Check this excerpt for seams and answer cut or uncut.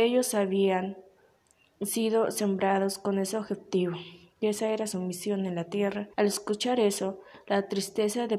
cut